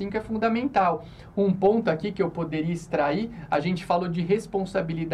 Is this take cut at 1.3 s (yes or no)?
no